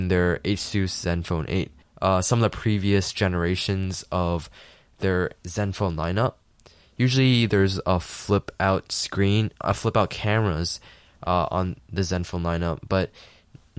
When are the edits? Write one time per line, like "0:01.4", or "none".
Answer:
0:01.8